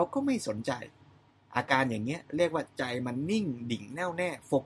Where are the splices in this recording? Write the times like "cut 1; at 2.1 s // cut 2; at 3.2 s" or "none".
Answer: none